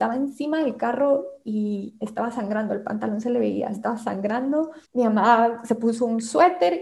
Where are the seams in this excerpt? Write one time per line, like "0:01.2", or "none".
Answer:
0:04.8